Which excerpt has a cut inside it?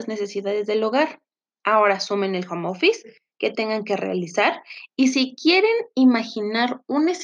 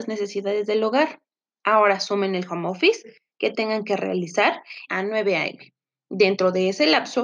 second; 1 cut; at 4.9 s

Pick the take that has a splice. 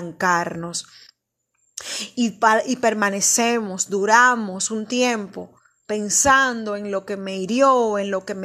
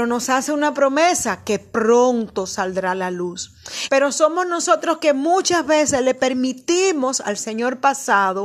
second; 1 cut; at 3.9 s

